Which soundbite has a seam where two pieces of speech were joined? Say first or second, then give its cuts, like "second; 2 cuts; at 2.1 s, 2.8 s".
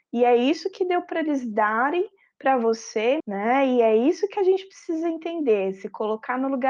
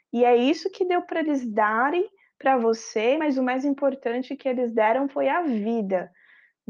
first; 1 cut; at 3.2 s